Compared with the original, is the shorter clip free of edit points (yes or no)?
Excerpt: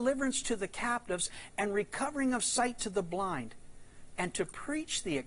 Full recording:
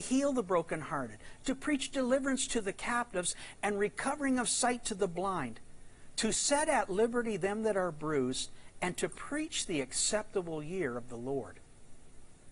no